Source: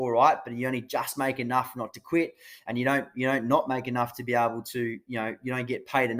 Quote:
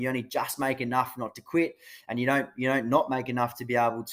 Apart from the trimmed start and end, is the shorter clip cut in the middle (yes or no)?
no